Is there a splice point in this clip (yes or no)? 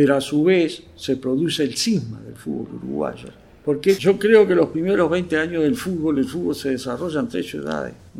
yes